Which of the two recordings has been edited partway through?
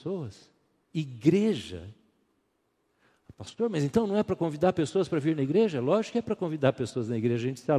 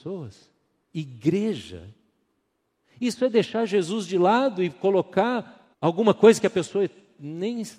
second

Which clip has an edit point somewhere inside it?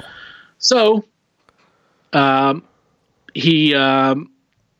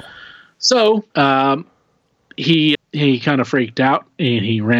second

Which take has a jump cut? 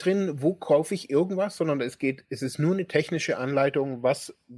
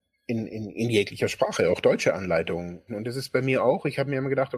second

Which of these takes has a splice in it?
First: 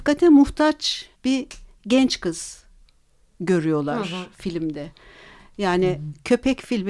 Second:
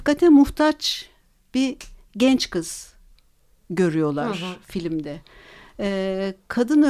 first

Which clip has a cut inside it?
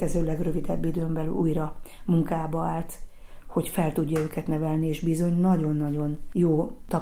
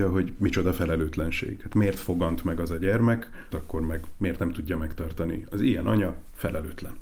second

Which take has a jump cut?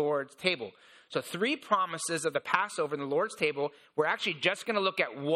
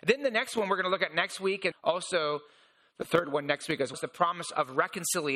second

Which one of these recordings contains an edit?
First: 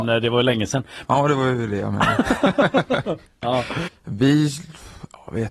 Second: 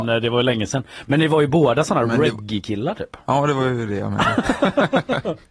first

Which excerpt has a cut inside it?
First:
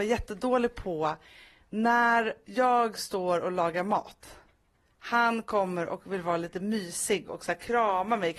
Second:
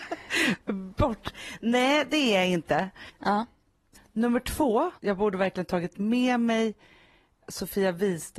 second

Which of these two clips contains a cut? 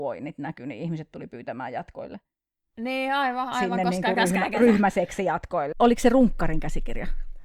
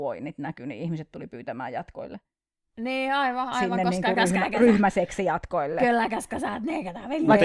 first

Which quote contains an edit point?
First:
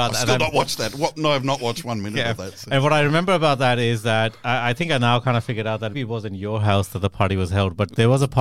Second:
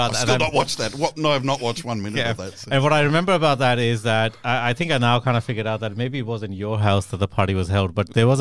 first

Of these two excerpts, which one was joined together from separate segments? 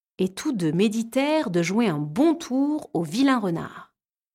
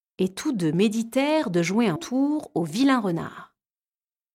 second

